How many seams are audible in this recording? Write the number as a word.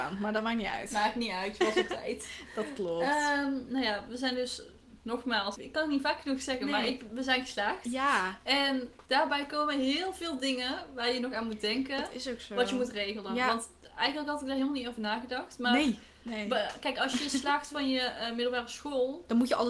one